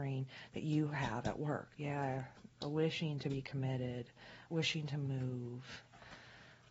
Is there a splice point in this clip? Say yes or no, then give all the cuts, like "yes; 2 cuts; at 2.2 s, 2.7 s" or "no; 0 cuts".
yes; 2 cuts; at 1.8 s, 4.5 s